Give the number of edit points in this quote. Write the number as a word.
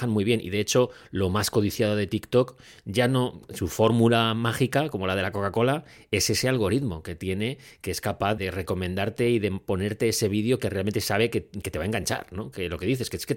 one